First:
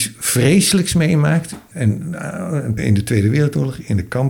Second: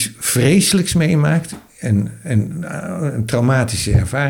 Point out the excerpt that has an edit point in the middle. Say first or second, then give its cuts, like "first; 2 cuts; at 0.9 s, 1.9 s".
first; 2 cuts; at 1.7 s, 2.8 s